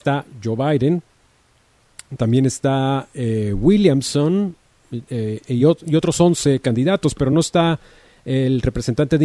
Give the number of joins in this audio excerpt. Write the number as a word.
zero